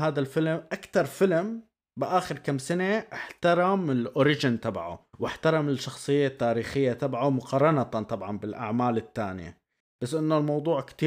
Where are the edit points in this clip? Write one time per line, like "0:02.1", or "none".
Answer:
0:05.1